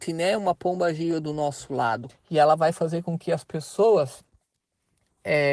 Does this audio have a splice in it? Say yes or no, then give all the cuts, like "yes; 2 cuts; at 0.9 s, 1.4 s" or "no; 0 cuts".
yes; 1 cut; at 2.1 s